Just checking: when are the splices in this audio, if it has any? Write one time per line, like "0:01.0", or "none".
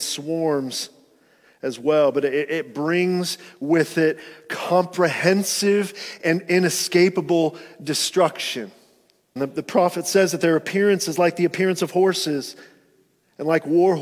0:09.4